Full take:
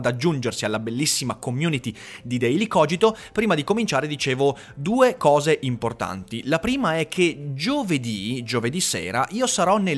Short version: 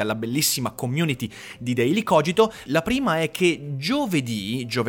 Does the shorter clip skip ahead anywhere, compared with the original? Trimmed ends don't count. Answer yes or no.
yes